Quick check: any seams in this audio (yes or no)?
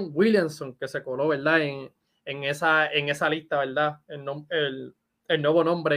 no